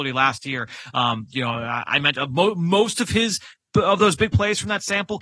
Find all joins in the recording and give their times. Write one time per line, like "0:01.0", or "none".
none